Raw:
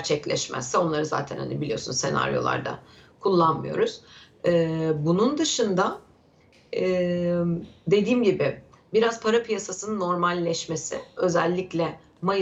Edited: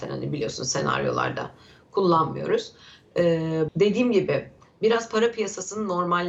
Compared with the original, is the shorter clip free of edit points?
no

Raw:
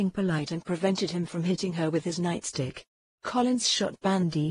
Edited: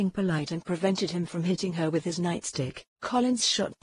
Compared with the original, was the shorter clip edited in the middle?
yes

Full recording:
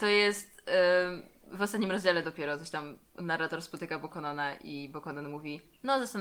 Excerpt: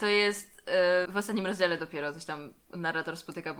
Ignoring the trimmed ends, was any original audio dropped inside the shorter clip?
yes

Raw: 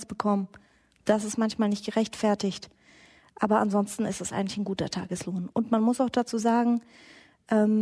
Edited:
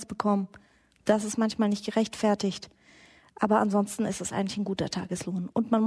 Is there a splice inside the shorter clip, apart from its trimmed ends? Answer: no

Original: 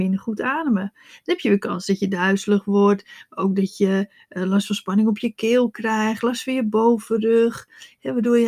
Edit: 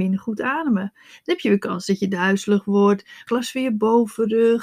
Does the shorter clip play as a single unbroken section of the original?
no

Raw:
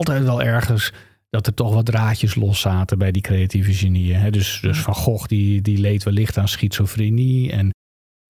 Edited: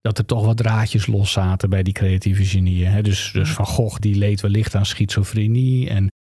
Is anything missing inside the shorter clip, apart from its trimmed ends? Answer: yes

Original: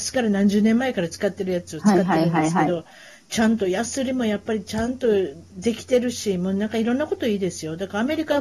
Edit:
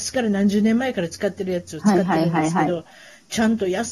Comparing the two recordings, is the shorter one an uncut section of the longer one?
yes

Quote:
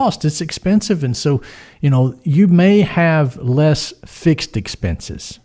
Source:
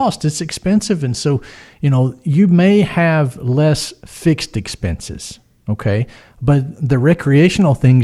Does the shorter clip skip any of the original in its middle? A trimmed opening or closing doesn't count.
no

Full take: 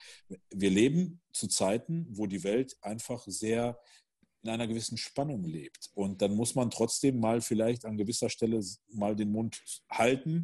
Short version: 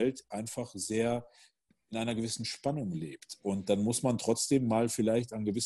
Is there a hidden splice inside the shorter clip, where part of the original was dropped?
no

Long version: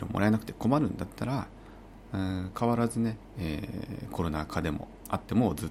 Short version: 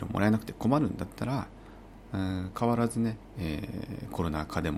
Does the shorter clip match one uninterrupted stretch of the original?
yes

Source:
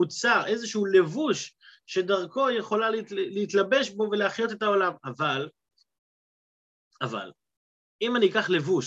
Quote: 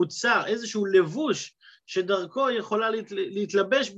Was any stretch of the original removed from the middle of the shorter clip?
no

